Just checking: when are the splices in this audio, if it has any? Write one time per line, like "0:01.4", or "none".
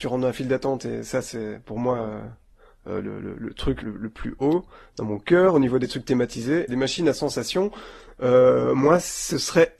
0:03.8
0:06.7